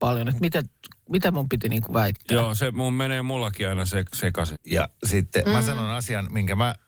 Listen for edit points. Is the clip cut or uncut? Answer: cut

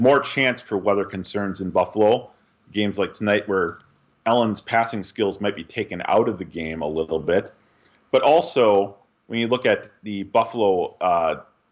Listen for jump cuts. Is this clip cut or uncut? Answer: uncut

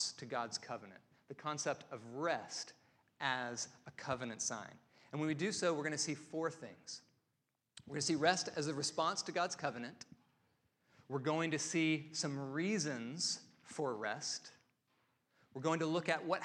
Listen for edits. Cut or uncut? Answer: uncut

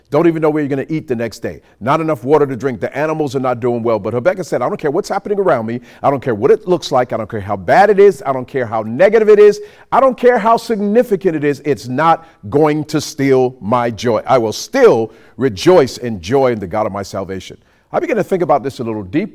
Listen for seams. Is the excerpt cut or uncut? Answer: uncut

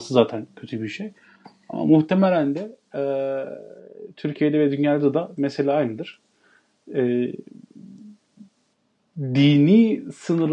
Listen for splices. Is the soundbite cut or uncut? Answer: uncut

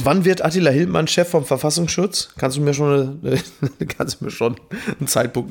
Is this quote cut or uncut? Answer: uncut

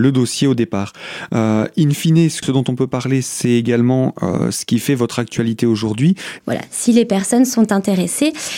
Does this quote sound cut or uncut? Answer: cut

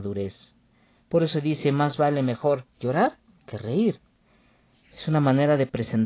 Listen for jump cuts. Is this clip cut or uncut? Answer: uncut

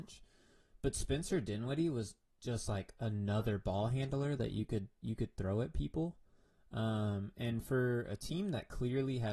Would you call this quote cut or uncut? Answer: uncut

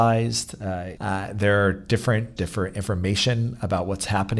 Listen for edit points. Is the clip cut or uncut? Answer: cut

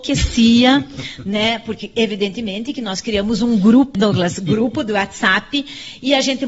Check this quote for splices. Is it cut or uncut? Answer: cut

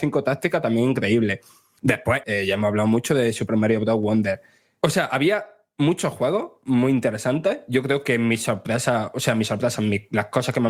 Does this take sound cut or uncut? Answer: cut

